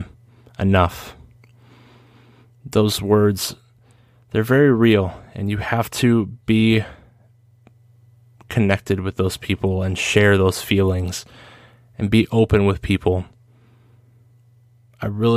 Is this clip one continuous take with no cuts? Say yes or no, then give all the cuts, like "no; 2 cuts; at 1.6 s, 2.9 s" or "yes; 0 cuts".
yes; 0 cuts